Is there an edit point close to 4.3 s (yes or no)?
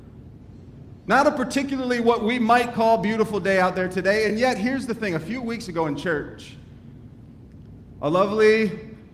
no